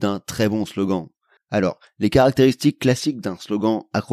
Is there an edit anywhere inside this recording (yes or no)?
yes